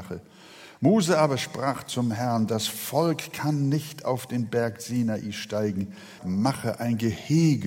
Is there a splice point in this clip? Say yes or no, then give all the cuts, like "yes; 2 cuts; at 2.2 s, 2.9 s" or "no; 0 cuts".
yes; 1 cut; at 6.2 s